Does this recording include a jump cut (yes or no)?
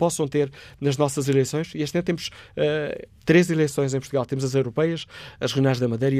no